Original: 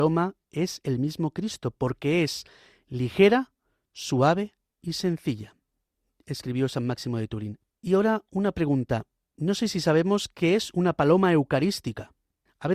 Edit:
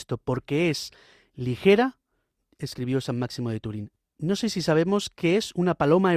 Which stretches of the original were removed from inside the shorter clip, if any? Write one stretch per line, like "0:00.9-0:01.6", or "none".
0:03.9-0:06.0
0:07.7-0:09.2